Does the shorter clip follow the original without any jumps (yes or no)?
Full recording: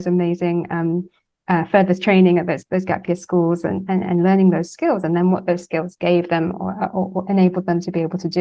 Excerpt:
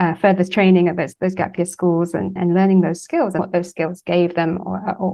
no